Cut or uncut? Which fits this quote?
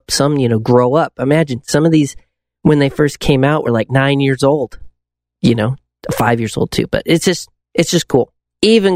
uncut